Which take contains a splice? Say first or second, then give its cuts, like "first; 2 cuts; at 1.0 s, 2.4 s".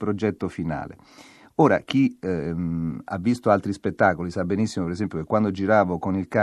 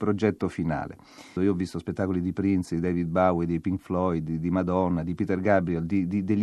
second; 1 cut; at 1.4 s